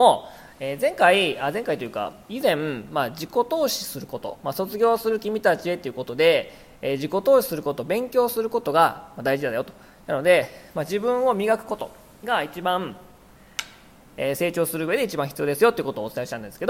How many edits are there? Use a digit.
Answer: 0